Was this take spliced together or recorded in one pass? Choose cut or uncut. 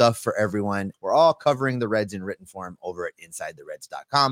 cut